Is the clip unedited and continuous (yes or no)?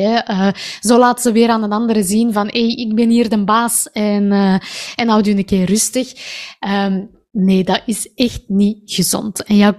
yes